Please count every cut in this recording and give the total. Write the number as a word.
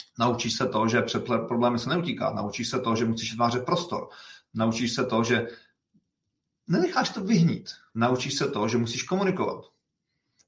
one